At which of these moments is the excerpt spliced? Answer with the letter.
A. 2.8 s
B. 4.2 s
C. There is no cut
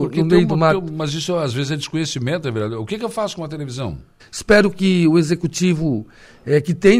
B